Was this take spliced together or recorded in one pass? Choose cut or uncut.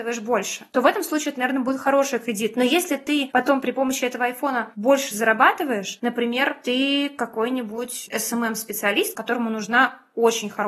cut